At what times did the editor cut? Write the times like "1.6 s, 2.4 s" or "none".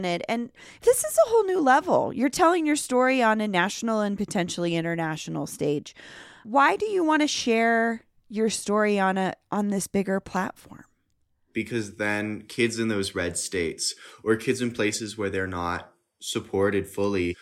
none